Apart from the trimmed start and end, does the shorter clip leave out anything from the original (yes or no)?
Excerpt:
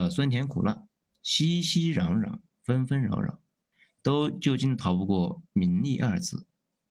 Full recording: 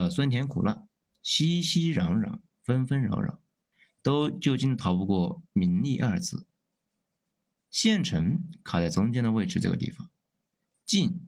no